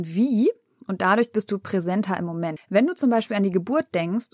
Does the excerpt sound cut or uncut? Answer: cut